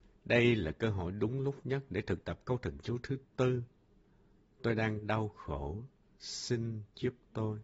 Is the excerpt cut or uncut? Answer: uncut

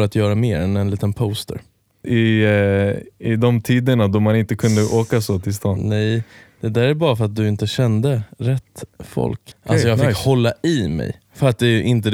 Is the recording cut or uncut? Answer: cut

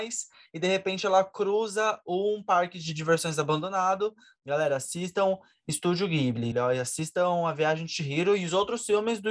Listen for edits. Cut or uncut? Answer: cut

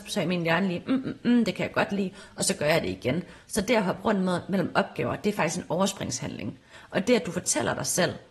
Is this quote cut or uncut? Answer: uncut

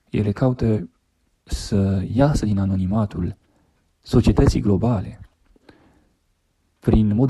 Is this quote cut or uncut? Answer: uncut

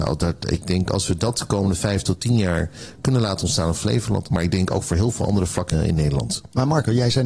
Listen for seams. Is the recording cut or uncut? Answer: cut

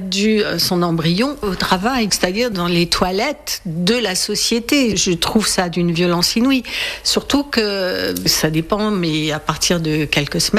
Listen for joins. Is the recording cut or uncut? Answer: cut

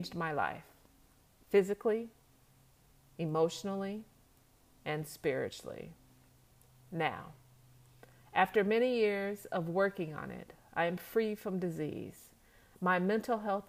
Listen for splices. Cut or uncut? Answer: uncut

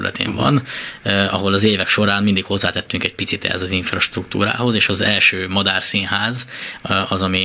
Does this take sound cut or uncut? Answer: uncut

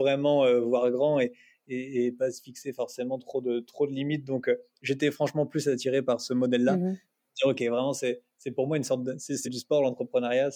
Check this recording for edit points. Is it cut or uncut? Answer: uncut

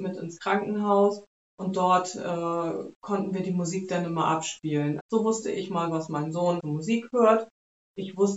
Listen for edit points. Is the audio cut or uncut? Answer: cut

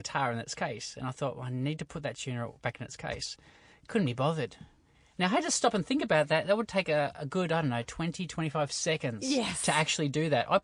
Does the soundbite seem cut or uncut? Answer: uncut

